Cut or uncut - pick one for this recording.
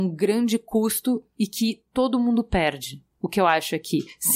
uncut